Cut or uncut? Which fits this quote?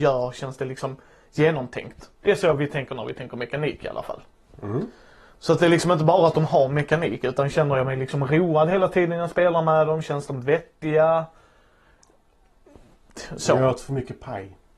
uncut